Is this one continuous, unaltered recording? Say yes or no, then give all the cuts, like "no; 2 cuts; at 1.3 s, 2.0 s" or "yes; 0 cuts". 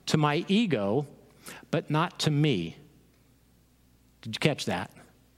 yes; 0 cuts